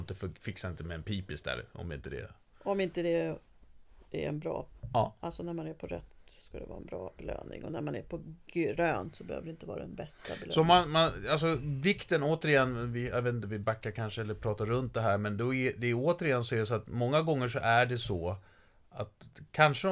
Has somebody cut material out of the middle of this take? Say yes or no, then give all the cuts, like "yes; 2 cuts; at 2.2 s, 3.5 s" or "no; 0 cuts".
no; 0 cuts